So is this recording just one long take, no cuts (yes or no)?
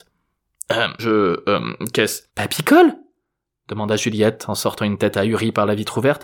no